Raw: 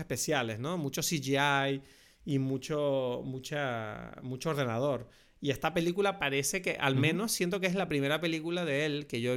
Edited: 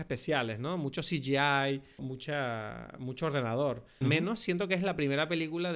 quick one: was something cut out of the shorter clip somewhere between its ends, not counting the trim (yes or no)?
yes